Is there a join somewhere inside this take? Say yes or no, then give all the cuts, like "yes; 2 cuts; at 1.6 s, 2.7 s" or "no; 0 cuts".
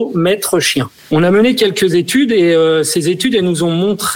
yes; 1 cut; at 1.0 s